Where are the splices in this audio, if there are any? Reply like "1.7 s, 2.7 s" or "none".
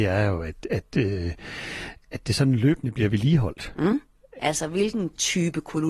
4.4 s